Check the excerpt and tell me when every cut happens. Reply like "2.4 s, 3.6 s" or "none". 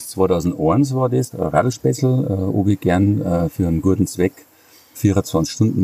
1.3 s